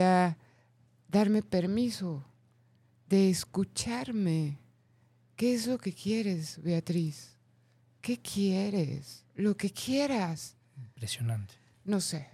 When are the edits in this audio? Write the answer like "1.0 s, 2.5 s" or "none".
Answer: none

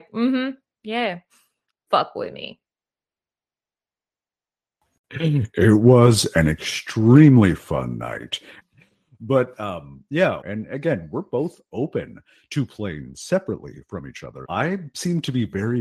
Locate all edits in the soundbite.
8.6 s, 10.4 s, 14.4 s

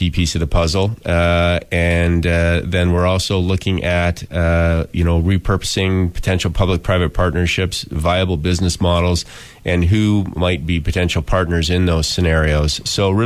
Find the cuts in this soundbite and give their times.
none

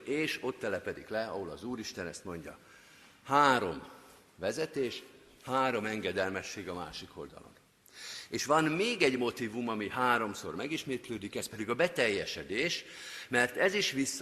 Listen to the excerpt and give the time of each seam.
none

